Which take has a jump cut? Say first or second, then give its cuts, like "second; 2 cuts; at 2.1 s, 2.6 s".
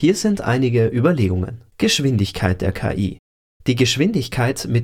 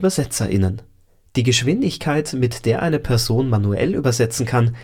first; 1 cut; at 1.7 s